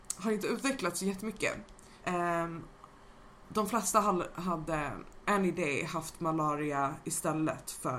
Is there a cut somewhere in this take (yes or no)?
yes